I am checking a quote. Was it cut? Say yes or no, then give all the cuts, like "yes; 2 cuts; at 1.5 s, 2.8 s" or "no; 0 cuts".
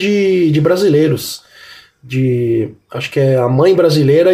no; 0 cuts